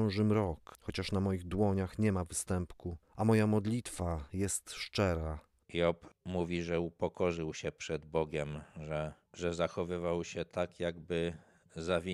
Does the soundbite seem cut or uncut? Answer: uncut